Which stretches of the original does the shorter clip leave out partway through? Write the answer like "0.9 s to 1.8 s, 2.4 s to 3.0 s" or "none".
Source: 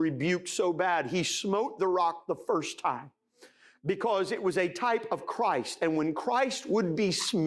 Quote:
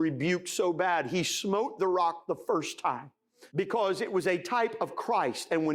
3.5 s to 3.8 s